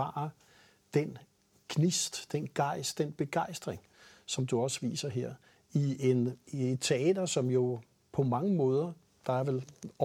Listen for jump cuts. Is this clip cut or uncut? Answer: uncut